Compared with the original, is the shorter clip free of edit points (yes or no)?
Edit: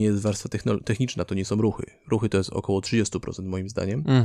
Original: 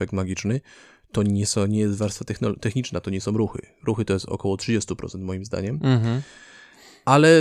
yes